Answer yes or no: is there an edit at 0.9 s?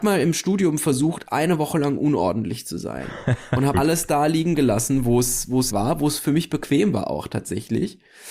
no